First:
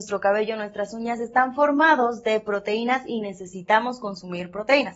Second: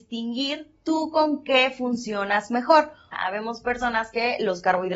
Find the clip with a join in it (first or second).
second